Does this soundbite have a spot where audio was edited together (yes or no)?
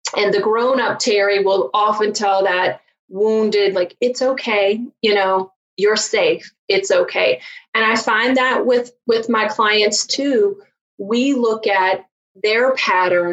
yes